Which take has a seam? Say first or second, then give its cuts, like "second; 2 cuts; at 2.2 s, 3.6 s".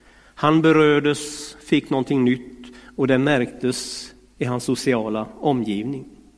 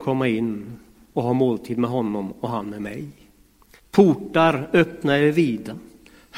second; 1 cut; at 3.8 s